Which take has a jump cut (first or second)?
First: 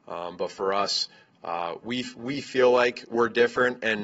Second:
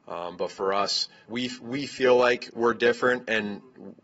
second